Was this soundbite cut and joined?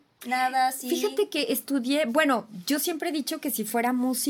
no; 0 cuts

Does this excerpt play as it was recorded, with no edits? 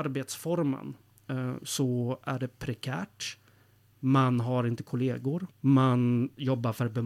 no; 1 cut; at 5.5 s

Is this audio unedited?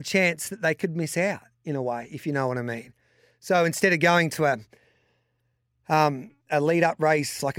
yes; 0 cuts

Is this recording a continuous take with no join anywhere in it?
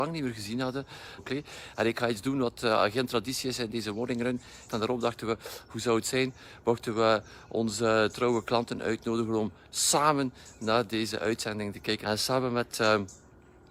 no; 3 cuts; at 1.2 s, 4.7 s, 12.0 s

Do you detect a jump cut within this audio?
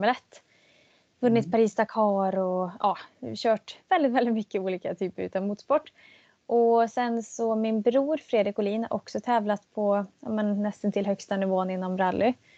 no; 0 cuts

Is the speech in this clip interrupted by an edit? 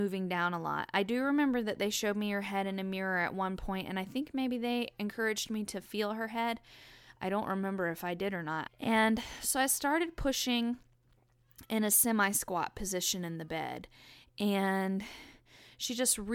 yes; 1 cut; at 8.7 s

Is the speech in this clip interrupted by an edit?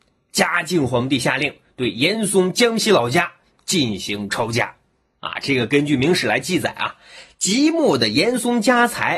no; 0 cuts

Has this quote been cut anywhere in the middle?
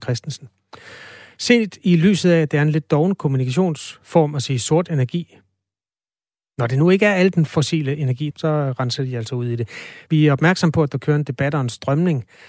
yes; 2 cuts; at 8.3 s, 10.1 s

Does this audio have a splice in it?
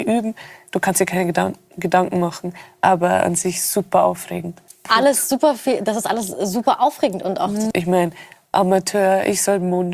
yes; 2 cuts; at 4.7 s, 7.7 s

